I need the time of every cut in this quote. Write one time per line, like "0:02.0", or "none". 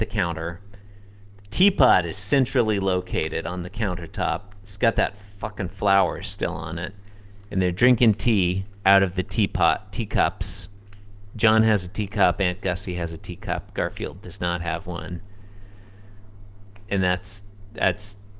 none